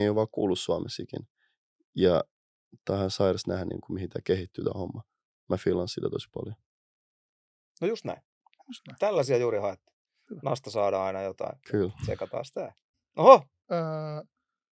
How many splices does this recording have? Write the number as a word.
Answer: two